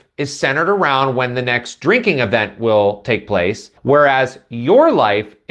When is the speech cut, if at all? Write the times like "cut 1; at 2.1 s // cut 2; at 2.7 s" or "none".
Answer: cut 1; at 3.8 s